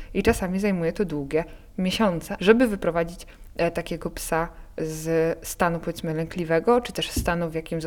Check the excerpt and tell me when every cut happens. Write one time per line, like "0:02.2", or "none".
0:02.4

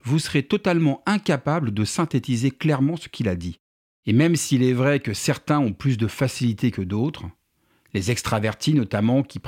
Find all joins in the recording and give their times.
0:03.9

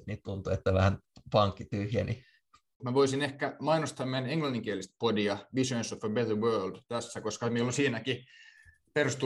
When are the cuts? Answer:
0:02.8

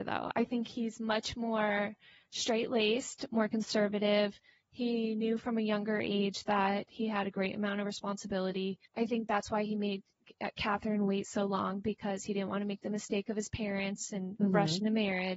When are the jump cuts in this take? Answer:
0:08.9

